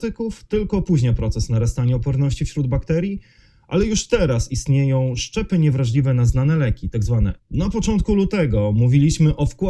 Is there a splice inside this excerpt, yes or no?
yes